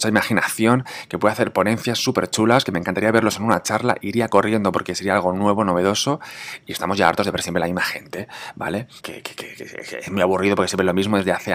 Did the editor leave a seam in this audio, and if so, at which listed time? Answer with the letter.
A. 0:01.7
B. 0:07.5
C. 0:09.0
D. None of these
C